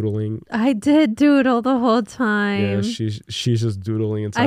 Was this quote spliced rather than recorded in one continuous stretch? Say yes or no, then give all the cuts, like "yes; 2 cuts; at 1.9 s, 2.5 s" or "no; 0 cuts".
no; 0 cuts